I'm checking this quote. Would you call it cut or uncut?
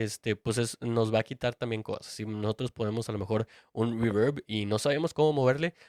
uncut